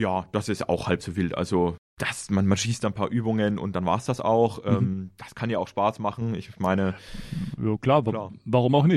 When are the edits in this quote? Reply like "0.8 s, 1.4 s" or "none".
none